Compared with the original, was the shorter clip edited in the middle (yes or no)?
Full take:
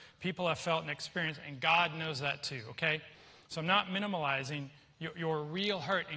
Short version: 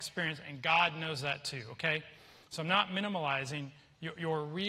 no